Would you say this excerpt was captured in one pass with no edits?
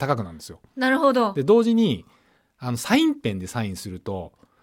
yes; 0 cuts

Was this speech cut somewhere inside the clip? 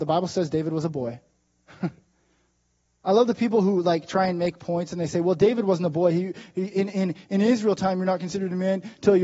no; 0 cuts

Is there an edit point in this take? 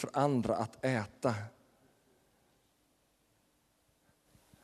no; 0 cuts

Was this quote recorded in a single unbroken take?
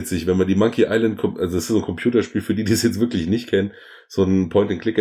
yes; 0 cuts

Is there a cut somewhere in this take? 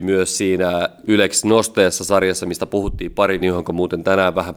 yes; 1 cut; at 3.4 s

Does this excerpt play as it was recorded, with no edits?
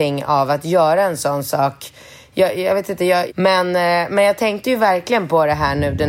no; 1 cut; at 3.3 s

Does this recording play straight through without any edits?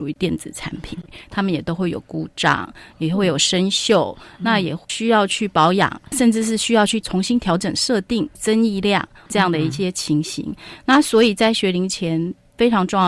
yes; 0 cuts

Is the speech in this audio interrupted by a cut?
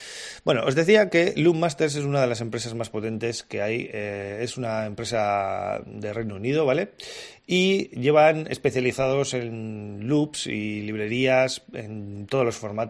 no; 0 cuts

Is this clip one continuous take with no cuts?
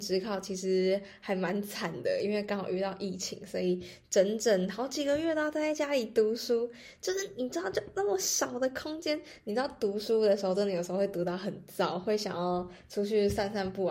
yes; 0 cuts

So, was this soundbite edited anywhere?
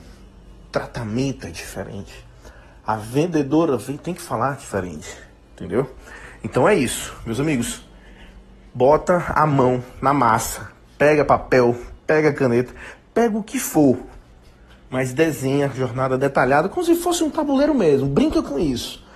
no; 0 cuts

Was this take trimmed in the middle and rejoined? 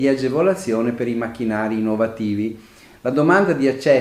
no; 0 cuts

